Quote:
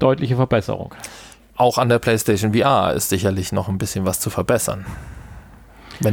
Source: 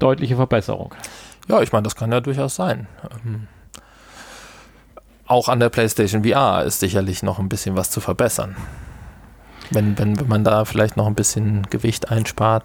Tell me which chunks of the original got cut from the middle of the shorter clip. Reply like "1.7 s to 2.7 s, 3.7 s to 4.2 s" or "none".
1.4 s to 5.1 s